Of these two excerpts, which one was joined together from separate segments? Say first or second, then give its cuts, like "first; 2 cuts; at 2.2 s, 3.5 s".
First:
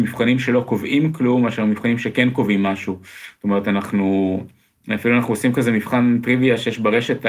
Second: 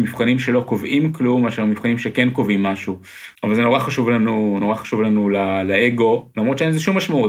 second; 1 cut; at 3.4 s